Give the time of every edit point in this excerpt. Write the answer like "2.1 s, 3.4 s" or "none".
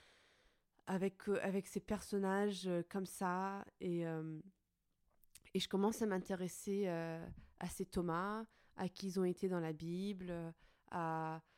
none